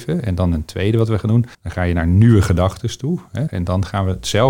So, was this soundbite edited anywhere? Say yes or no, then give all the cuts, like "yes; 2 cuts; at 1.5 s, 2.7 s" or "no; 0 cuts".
yes; 2 cuts; at 1.5 s, 3.5 s